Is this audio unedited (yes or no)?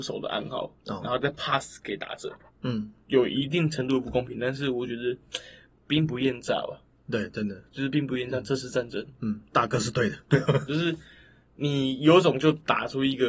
no